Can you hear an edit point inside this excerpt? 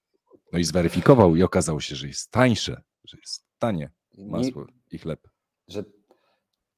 no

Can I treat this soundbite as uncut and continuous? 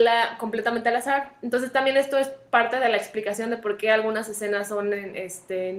yes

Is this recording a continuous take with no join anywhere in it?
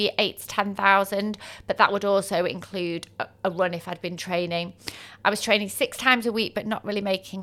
yes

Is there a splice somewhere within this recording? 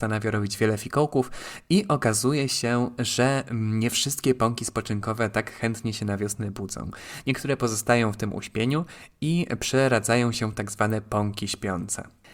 no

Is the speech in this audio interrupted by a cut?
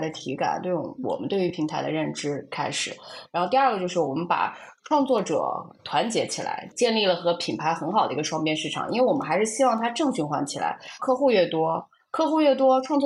yes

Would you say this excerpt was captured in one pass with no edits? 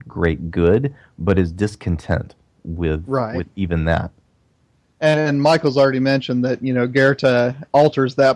yes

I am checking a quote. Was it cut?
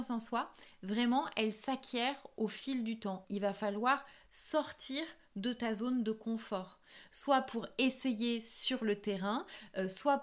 yes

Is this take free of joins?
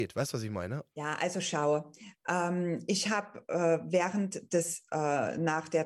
no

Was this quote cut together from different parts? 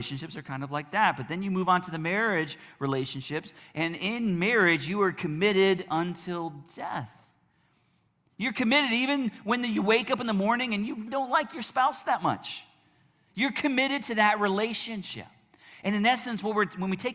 yes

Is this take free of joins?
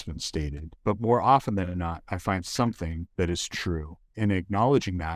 yes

